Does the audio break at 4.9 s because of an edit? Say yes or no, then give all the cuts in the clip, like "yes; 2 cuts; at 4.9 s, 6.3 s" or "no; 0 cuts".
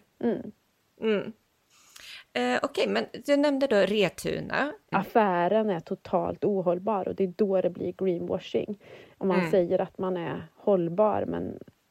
yes; 1 cut; at 4.9 s